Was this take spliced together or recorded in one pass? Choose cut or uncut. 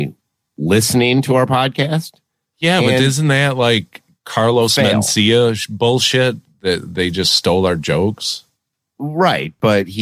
uncut